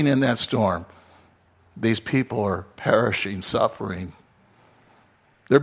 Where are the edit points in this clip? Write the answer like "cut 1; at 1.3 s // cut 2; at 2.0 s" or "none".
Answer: none